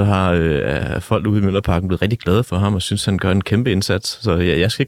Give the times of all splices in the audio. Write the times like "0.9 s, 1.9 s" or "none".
none